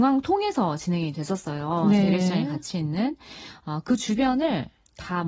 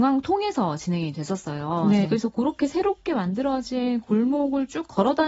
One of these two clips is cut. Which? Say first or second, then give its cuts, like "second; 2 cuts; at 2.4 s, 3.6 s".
second; 1 cut; at 2.0 s